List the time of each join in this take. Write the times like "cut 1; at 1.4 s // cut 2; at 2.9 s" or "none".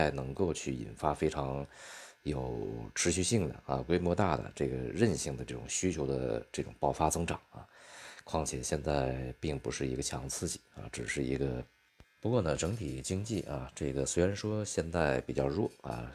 cut 1; at 12.0 s